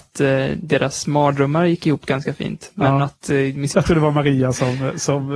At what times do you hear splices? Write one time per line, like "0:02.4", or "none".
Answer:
0:03.7